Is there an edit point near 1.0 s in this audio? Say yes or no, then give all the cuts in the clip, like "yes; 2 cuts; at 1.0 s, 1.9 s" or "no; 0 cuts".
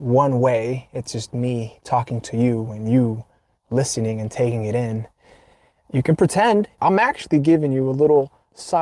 no; 1 cut; at 6.8 s